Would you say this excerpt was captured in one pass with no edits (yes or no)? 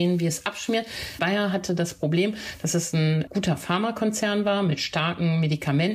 no